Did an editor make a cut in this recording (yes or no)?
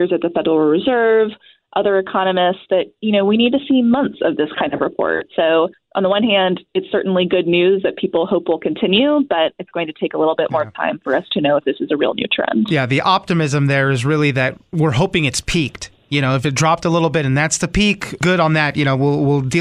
no